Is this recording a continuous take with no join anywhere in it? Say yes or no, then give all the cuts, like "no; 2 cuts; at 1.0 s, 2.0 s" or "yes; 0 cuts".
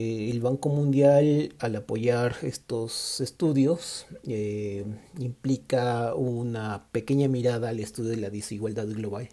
yes; 0 cuts